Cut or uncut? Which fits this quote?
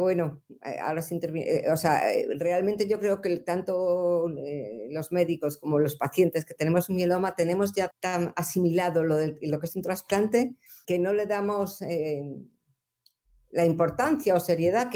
cut